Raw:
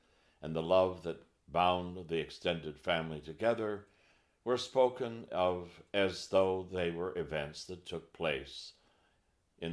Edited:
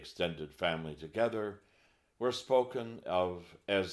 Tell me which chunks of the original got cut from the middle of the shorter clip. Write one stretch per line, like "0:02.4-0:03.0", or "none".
none